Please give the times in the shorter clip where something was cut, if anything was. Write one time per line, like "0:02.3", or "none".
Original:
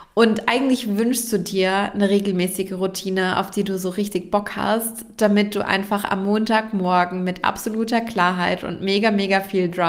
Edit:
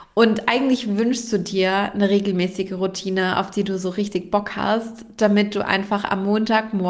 none